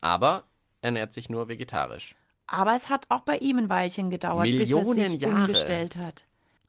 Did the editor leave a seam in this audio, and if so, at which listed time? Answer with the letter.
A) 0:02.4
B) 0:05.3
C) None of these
C